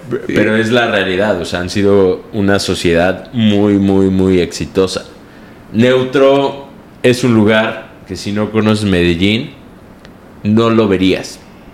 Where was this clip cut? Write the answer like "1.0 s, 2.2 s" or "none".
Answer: none